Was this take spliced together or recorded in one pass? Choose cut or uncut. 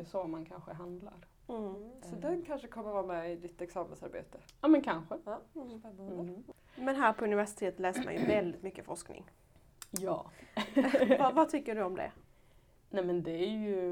uncut